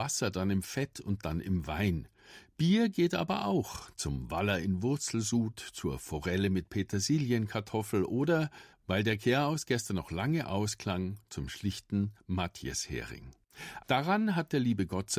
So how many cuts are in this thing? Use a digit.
2